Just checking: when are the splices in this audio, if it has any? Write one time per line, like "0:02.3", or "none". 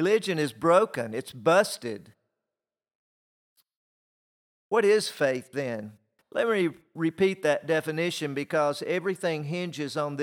0:06.2